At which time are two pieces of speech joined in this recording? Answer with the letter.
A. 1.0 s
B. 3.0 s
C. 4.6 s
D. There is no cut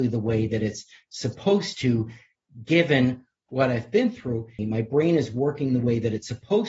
C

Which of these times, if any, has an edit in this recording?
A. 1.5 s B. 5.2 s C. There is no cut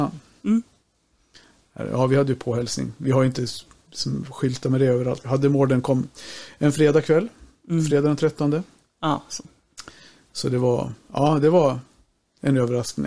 B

